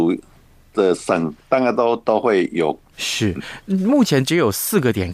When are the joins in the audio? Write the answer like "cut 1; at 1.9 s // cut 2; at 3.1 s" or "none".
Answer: cut 1; at 2.9 s